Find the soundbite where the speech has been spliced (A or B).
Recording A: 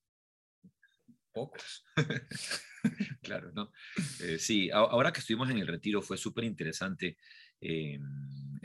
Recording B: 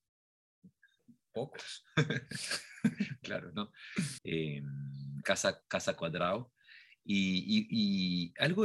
B